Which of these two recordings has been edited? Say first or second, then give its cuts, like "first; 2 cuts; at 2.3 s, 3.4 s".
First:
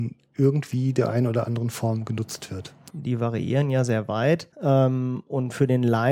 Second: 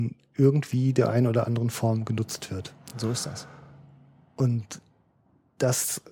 first; 2 cuts; at 2.9 s, 4.5 s